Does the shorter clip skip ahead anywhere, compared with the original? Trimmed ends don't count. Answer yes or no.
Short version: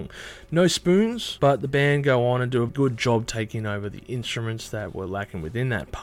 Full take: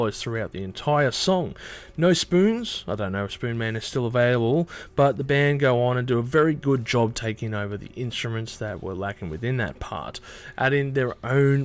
yes